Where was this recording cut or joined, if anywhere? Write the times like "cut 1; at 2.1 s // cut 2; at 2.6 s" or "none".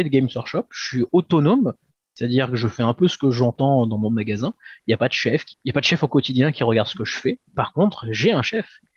none